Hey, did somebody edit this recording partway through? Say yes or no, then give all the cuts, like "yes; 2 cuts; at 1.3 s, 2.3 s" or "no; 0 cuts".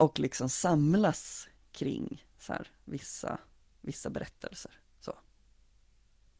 no; 0 cuts